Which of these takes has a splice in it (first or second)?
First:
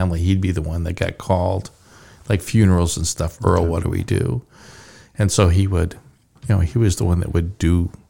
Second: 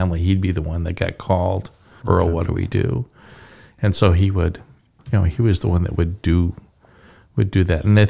second